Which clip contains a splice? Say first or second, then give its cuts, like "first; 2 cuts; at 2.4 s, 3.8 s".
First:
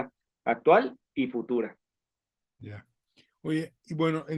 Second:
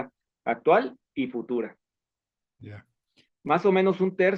second; 1 cut; at 3.3 s